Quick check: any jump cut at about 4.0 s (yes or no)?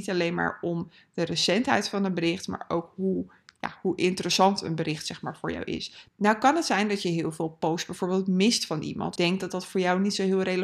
no